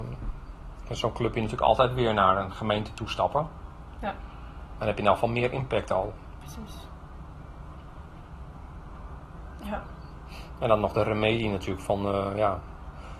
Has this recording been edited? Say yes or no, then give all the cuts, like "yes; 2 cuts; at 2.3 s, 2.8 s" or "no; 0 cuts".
no; 0 cuts